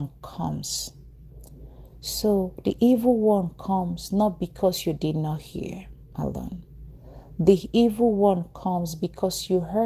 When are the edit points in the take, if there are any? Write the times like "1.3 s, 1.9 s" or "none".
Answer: none